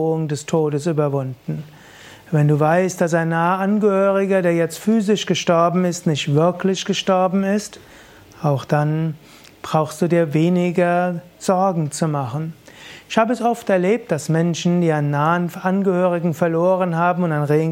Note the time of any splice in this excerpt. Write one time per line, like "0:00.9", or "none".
none

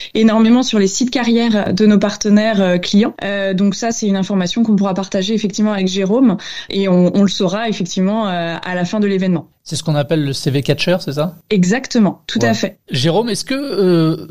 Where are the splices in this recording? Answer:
0:03.2
0:09.6

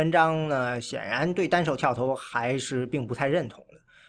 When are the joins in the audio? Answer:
none

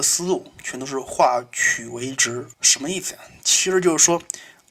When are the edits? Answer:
0:02.5

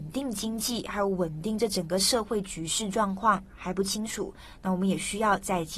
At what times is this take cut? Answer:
none

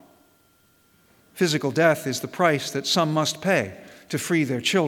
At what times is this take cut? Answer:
0:01.2

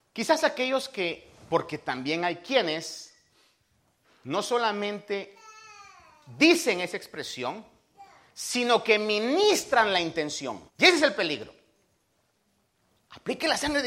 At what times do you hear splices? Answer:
0:10.7

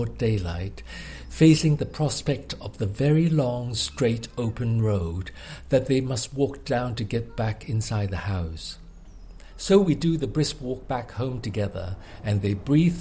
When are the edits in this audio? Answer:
none

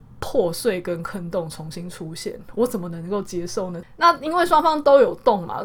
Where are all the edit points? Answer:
0:03.8

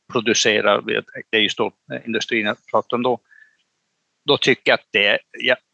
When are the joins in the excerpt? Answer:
none

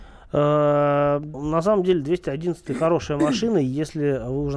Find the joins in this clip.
0:01.3

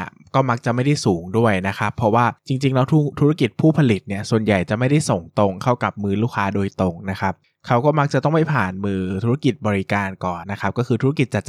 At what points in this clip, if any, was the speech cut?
0:10.4

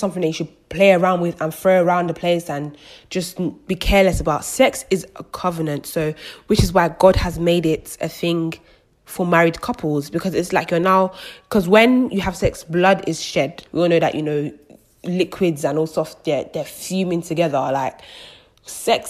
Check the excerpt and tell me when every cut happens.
0:13.7

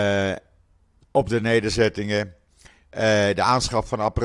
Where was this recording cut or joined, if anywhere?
none

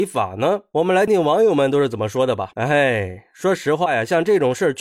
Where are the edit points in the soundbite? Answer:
0:01.1
0:02.5

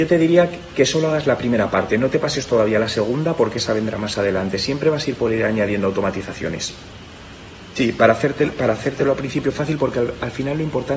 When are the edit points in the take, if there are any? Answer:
none

